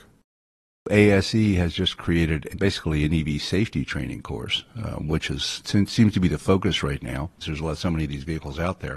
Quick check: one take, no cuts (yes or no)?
no